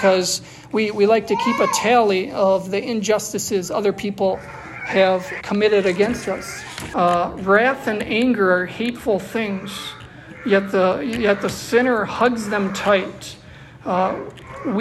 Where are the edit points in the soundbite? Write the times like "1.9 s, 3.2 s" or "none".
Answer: 5.4 s, 6.9 s